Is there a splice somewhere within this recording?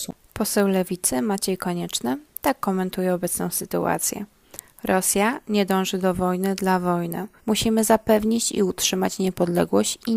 yes; 1 cut; at 7.4 s

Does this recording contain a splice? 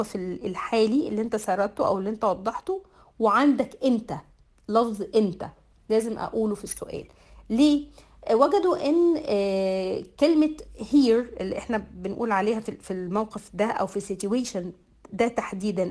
no; 0 cuts

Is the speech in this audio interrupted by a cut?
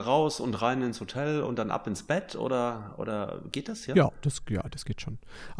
no; 0 cuts

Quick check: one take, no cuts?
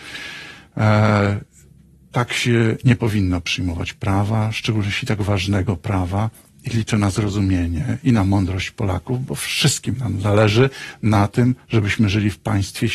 yes; 0 cuts

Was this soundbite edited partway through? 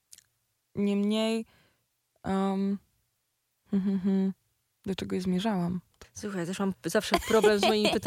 yes; 1 cut; at 6.0 s

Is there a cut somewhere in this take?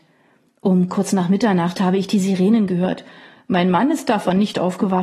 no; 0 cuts

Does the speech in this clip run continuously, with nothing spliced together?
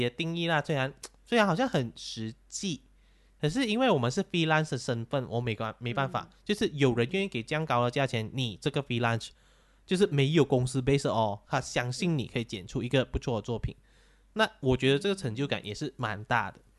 yes; 0 cuts

